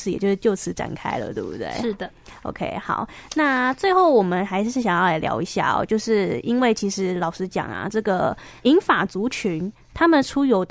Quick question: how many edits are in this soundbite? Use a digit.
1